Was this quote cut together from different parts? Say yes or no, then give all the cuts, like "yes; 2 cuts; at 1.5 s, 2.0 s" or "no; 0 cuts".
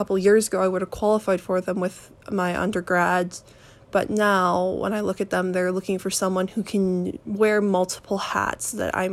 no; 0 cuts